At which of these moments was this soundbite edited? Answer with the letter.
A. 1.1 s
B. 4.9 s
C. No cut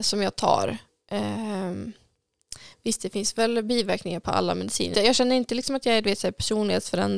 B